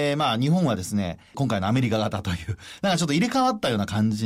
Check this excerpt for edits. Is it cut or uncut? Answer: cut